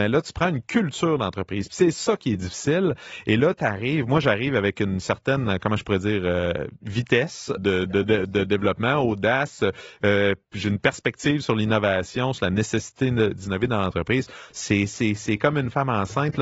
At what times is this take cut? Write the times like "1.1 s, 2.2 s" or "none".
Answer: 7.6 s, 14.5 s